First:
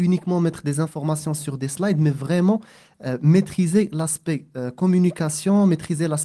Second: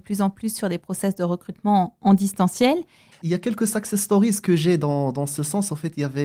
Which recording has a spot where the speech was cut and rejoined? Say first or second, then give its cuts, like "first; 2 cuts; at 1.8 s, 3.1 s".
second; 1 cut; at 3.1 s